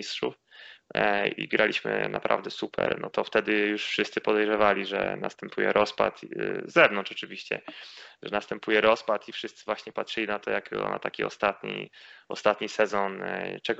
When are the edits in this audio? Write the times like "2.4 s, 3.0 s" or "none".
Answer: none